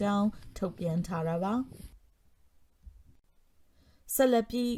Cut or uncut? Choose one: uncut